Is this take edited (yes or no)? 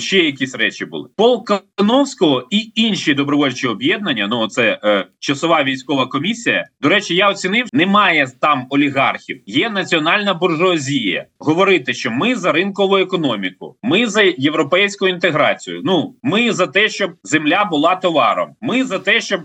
yes